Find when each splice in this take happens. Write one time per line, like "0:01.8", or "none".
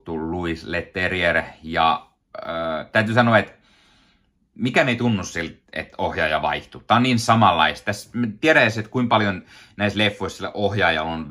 none